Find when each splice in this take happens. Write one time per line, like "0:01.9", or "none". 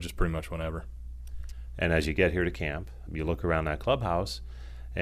0:03.1